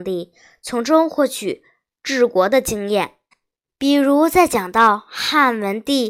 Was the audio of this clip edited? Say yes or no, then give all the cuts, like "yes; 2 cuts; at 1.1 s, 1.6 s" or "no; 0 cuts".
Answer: no; 0 cuts